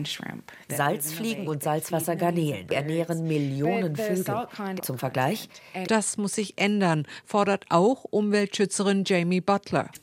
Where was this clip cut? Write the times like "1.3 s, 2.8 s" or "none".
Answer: 4.8 s, 5.8 s

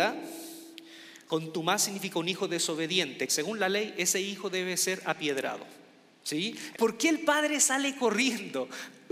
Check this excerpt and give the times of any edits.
1.3 s, 3.3 s, 6.7 s

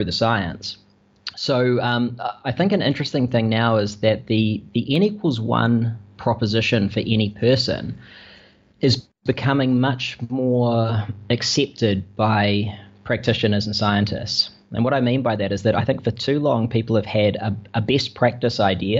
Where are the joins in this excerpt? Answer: none

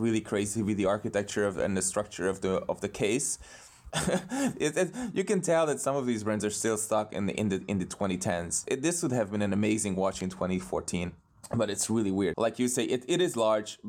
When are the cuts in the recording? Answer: 3.9 s, 8.7 s, 12.3 s

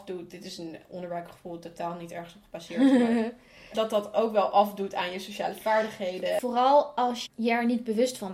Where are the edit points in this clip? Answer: 7.3 s

